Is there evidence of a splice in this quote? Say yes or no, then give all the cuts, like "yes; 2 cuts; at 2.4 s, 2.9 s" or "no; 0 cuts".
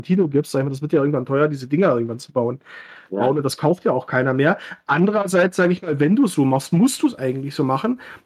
no; 0 cuts